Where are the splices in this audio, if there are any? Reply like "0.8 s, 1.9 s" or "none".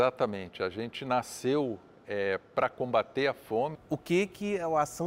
3.7 s